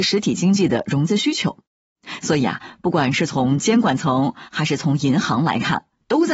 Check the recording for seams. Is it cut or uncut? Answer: uncut